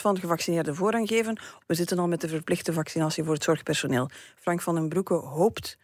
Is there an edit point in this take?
yes; 1 cut; at 1.6 s

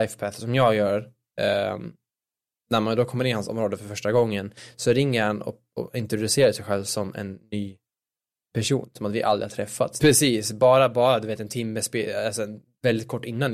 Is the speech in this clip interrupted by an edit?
yes; 1 cut; at 10.0 s

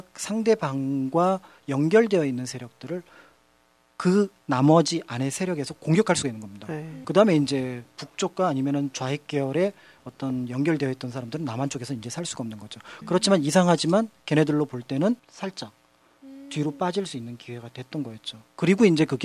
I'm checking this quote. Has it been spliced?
yes; 3 cuts; at 7.0 s, 13.0 s, 15.2 s

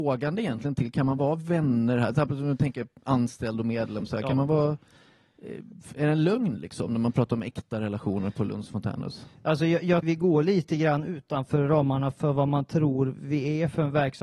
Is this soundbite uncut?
no; 1 cut; at 10.0 s

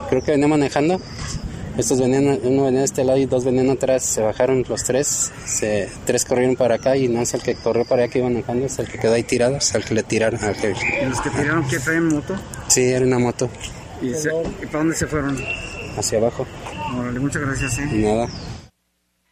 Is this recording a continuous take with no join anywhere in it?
yes; 0 cuts

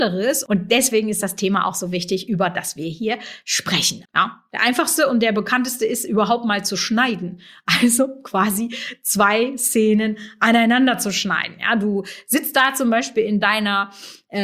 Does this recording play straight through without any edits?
no; 1 cut; at 4.0 s

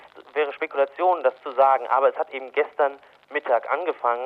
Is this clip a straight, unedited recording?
yes; 0 cuts

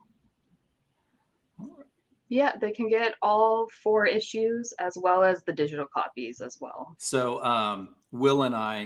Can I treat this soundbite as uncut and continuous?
no; 2 cuts; at 2.2 s, 7.0 s

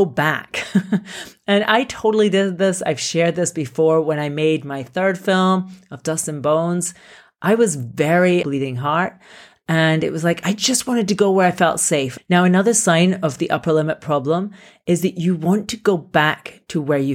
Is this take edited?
yes; 2 cuts; at 8.4 s, 12.2 s

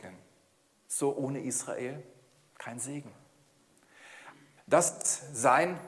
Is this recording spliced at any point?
yes; 1 cut; at 4.6 s

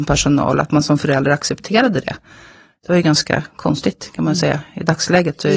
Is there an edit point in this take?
no; 0 cuts

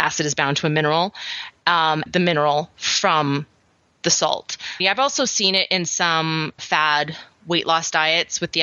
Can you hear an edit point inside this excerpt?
yes; 3 cuts; at 2.1 s, 4.8 s, 6.6 s

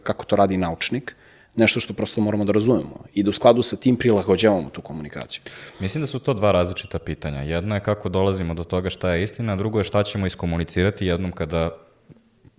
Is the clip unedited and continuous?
yes; 0 cuts

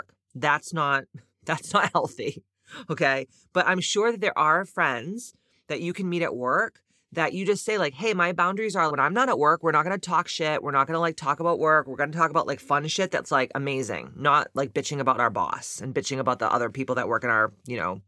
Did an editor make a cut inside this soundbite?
yes; 1 cut; at 8.9 s

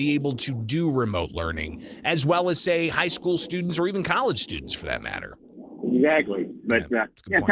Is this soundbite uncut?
yes; 0 cuts

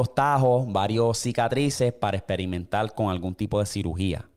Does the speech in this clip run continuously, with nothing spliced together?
yes; 0 cuts

